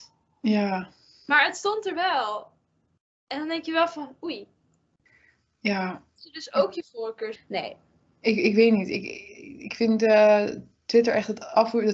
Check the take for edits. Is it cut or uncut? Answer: cut